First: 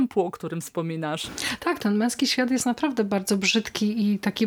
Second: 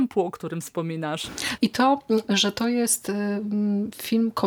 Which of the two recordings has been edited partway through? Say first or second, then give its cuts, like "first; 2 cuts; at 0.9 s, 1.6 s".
second; 1 cut; at 1.6 s